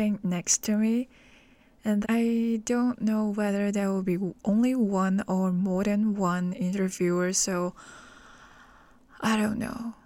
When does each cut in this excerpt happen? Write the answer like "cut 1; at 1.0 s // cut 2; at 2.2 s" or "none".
cut 1; at 2.0 s